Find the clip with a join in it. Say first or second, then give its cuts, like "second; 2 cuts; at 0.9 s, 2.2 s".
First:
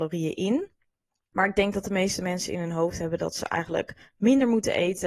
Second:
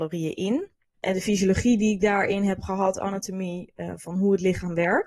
second; 1 cut; at 0.9 s